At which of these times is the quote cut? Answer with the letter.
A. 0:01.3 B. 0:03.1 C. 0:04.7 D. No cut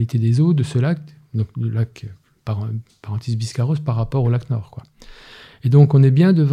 D